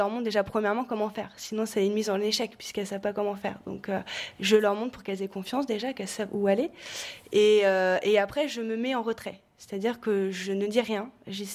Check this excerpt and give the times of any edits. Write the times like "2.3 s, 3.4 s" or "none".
none